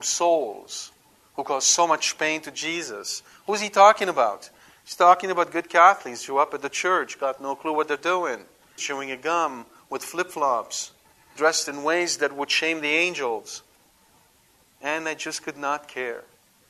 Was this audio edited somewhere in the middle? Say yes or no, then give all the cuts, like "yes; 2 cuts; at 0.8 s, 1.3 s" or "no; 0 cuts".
yes; 2 cuts; at 8.8 s, 11.4 s